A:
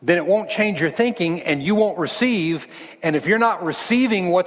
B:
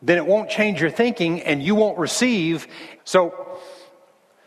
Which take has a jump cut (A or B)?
B